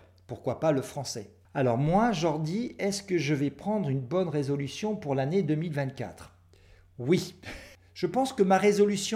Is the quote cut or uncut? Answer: uncut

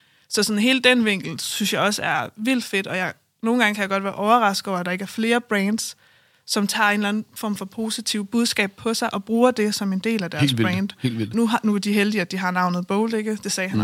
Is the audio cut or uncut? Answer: cut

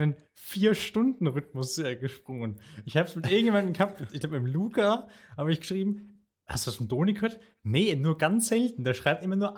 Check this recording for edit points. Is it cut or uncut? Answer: uncut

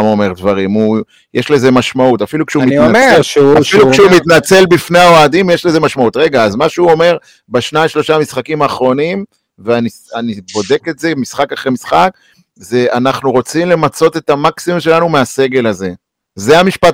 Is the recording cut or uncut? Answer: uncut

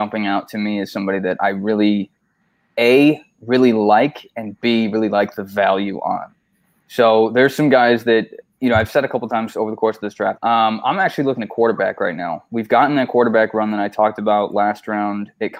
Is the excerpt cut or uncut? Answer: cut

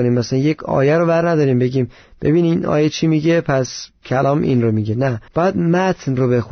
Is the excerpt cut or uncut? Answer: cut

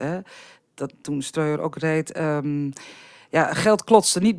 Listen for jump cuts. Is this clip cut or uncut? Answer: uncut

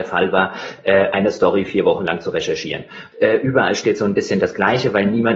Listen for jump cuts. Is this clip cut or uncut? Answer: cut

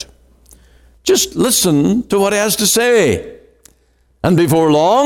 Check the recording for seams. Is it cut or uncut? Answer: cut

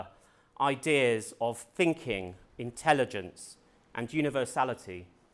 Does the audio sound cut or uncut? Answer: cut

